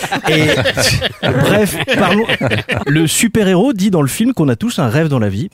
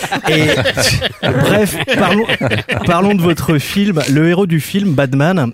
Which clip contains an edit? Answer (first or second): first